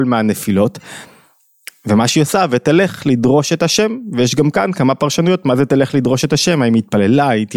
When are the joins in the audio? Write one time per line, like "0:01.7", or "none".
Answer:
none